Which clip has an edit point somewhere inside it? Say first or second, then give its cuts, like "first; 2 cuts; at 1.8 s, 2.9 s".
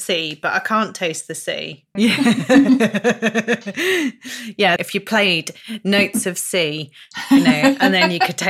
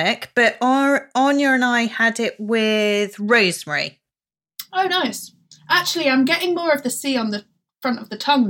first; 2 cuts; at 2.0 s, 4.8 s